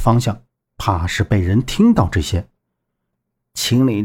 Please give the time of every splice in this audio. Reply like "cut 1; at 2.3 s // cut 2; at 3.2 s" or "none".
cut 1; at 3.1 s